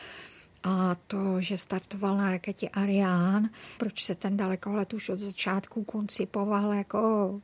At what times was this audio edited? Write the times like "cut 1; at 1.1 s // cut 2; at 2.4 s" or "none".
cut 1; at 3.8 s